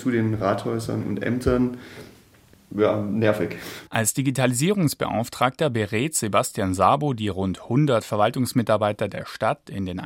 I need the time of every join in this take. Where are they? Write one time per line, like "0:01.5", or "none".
0:03.9